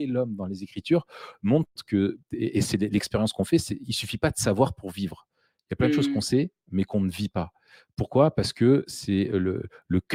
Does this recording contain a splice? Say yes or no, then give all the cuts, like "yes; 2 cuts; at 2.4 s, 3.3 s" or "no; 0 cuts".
no; 0 cuts